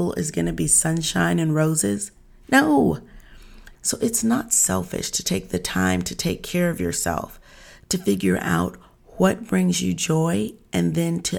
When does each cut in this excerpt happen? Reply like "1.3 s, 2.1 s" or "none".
3.7 s